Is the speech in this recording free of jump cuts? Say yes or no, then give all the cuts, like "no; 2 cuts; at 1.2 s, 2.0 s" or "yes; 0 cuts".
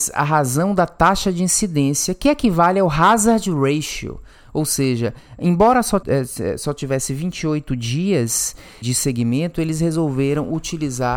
no; 2 cuts; at 6.0 s, 8.8 s